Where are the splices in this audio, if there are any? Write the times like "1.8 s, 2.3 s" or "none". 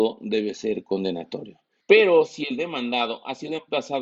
1.8 s